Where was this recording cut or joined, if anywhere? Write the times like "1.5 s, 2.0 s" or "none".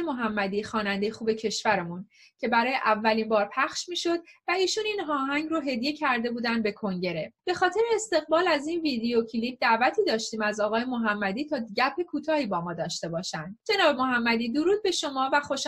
7.4 s, 13.6 s